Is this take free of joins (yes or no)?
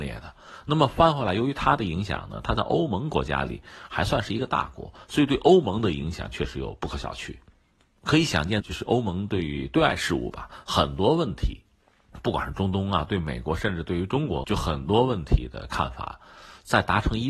no